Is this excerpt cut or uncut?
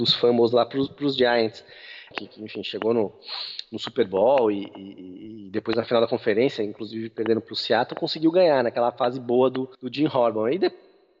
cut